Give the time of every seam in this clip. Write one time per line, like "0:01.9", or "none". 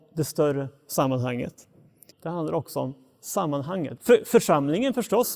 0:02.1
0:04.0